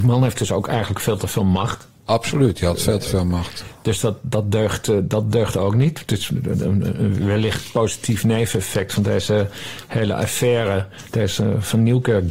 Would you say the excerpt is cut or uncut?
uncut